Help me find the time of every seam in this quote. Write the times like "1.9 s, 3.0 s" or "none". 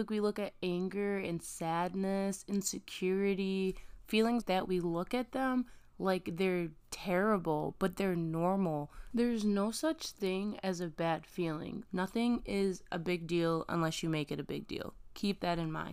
4.4 s, 9.1 s, 11.9 s